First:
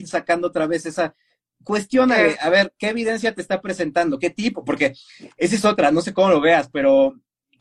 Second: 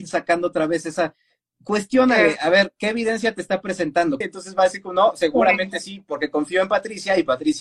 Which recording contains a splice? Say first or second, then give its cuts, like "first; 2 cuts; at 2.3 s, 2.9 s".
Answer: second; 1 cut; at 4.2 s